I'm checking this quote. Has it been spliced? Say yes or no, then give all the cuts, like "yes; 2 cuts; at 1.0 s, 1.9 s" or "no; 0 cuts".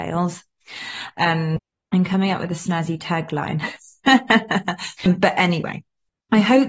yes; 2 cuts; at 1.1 s, 5.0 s